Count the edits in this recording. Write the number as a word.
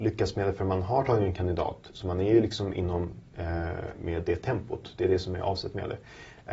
one